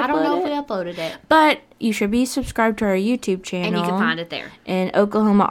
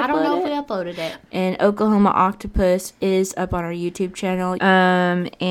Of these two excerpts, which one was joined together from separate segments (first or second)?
second